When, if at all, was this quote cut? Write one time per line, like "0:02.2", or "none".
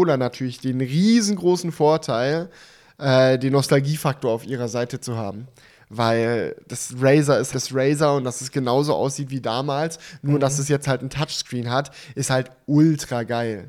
0:07.5